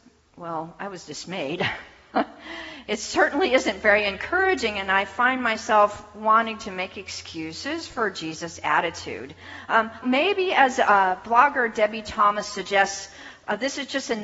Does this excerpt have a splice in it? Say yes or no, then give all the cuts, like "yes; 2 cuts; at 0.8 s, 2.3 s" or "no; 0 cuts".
yes; 1 cut; at 10.0 s